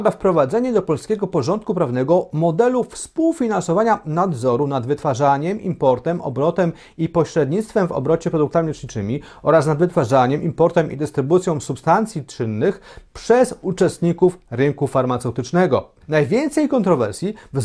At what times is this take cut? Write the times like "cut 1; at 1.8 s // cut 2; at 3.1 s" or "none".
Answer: cut 1; at 16.0 s